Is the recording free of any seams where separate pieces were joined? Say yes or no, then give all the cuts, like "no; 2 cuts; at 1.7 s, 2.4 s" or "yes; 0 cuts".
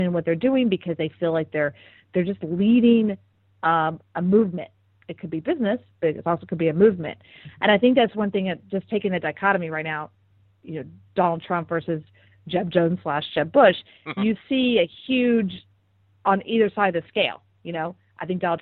yes; 0 cuts